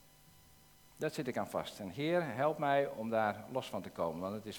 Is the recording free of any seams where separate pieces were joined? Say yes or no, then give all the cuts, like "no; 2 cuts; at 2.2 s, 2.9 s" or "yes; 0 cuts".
yes; 0 cuts